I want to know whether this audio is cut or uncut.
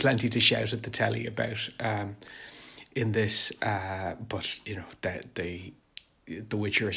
uncut